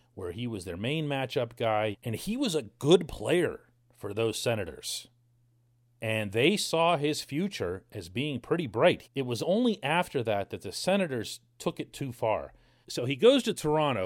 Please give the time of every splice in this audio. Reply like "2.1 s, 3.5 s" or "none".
1.9 s, 9.0 s, 12.8 s

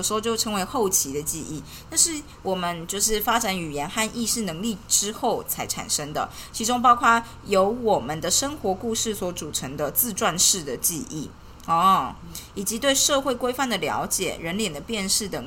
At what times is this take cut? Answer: none

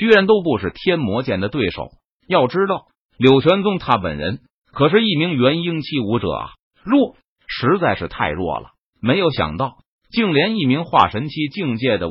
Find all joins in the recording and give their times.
10.0 s

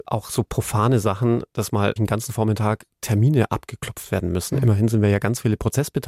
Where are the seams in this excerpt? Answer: 2.0 s

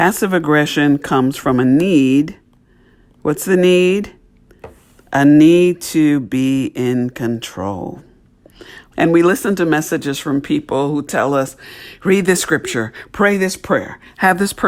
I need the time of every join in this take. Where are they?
8.9 s

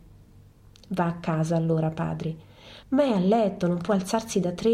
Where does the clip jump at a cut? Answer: 2.8 s

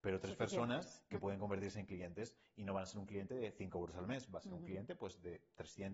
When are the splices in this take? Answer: none

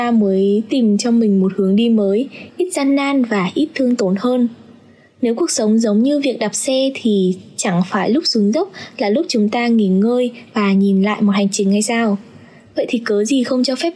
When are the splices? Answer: 2.5 s

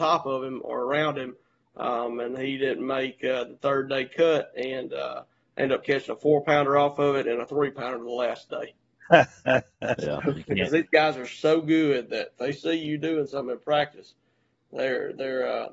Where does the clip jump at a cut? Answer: 9.0 s

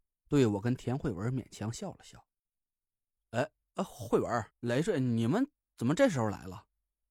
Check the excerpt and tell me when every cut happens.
3.2 s, 4.5 s

